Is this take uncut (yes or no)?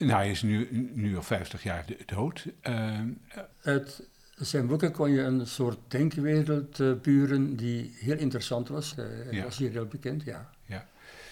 no